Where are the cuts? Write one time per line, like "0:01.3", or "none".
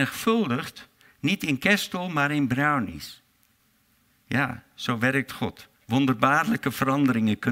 0:05.7